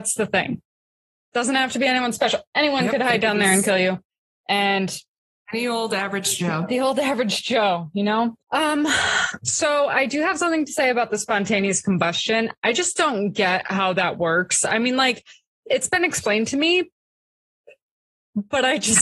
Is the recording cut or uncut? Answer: cut